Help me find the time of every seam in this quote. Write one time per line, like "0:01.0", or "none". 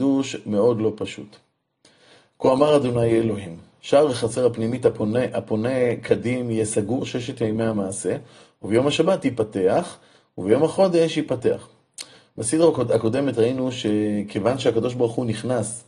none